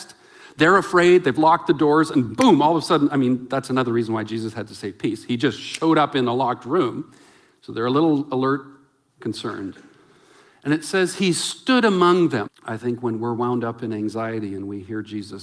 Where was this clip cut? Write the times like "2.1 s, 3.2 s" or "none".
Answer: 9.1 s, 12.5 s